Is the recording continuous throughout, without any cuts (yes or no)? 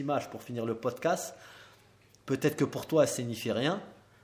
yes